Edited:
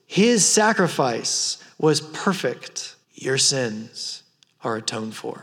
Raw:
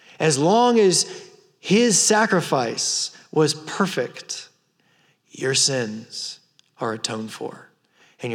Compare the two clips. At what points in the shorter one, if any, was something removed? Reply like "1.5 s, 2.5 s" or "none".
3.0 s